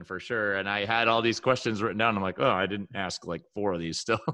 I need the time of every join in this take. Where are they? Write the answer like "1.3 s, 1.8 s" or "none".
none